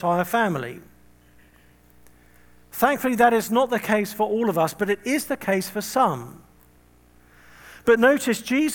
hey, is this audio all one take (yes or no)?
yes